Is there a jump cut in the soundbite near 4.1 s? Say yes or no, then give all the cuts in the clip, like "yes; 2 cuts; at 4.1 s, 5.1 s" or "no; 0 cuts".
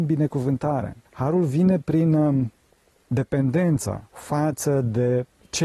yes; 2 cuts; at 1.0 s, 4.1 s